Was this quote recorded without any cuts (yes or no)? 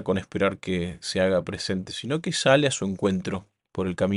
yes